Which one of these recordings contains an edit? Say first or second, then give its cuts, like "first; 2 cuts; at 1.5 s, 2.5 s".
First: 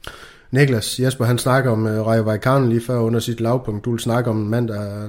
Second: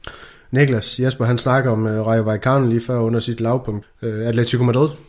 second; 1 cut; at 3.8 s